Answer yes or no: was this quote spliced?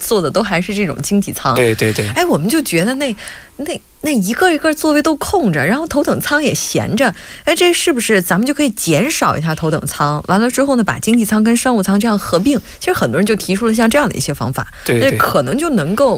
no